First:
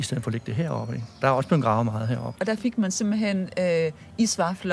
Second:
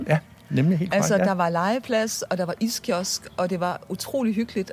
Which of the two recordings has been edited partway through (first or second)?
first